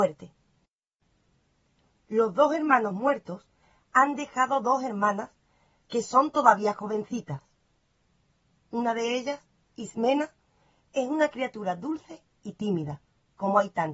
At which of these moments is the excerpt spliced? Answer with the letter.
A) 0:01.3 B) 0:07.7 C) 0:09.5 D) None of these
D